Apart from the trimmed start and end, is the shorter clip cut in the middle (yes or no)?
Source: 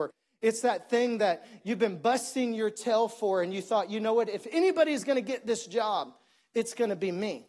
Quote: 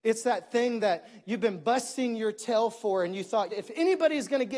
yes